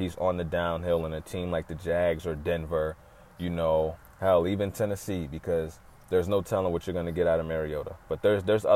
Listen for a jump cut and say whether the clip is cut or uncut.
uncut